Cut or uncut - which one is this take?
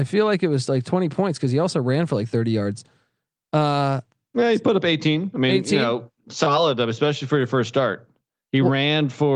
uncut